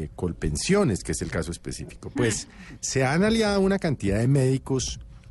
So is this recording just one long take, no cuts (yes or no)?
yes